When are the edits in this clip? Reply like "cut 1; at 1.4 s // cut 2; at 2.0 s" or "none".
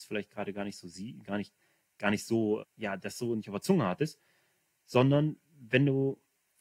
cut 1; at 2.6 s